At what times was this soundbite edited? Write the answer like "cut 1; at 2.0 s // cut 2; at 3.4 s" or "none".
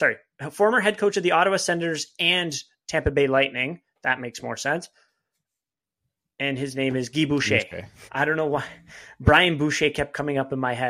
cut 1; at 8.1 s